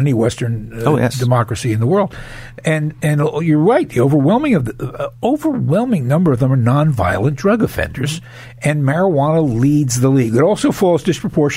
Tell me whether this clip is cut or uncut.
uncut